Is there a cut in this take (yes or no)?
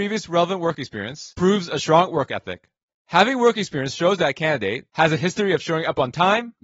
no